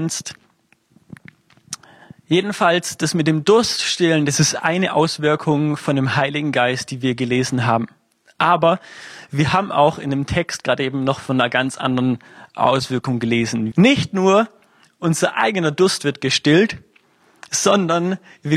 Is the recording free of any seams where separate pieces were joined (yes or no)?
no